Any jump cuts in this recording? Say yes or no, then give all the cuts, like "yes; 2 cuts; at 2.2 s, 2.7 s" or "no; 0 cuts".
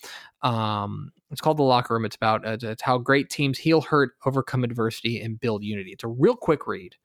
no; 0 cuts